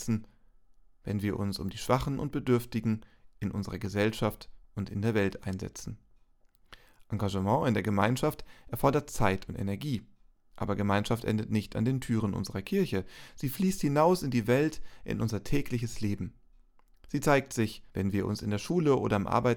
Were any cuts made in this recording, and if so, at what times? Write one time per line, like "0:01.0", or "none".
0:10.5
0:17.9

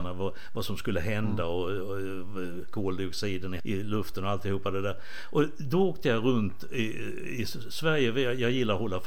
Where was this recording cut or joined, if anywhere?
0:03.6

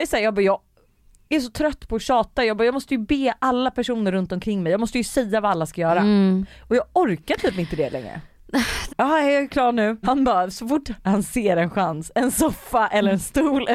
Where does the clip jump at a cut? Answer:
0:08.9
0:10.0

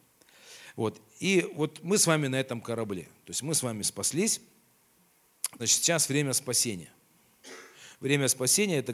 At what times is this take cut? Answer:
0:05.6

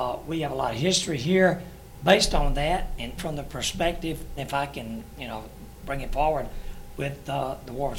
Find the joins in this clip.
0:03.2
0:04.4

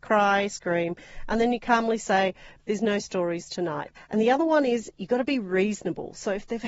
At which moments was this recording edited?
0:02.6
0:04.0

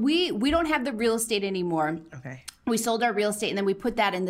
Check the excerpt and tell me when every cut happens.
none

